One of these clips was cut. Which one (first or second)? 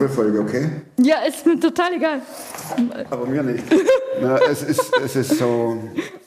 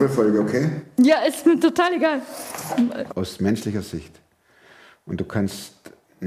second